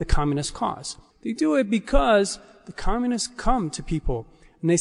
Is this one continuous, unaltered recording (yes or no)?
no